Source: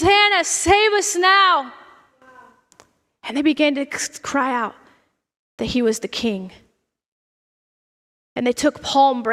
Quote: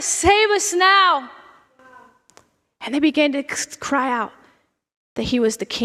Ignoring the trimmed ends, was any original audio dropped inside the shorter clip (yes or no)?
no